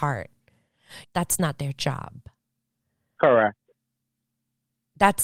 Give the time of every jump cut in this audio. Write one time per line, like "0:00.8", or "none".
0:01.0